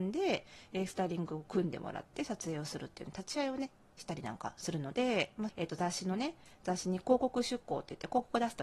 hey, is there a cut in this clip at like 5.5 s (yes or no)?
yes